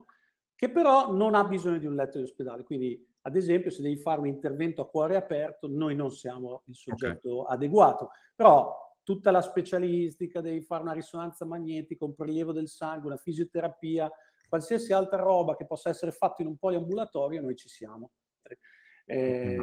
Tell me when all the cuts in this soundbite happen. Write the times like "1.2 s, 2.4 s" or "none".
18.4 s